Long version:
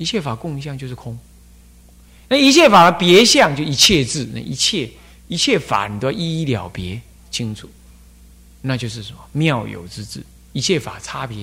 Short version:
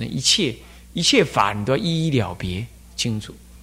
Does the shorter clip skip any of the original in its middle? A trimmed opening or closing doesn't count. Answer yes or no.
no